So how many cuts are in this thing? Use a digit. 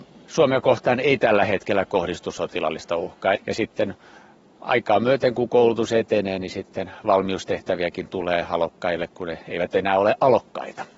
1